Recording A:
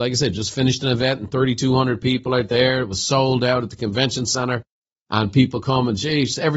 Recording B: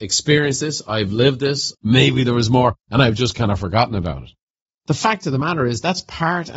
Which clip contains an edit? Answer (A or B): B